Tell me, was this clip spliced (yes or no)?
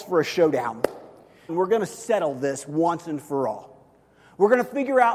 yes